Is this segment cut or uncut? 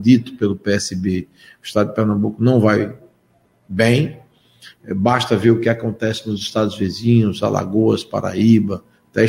uncut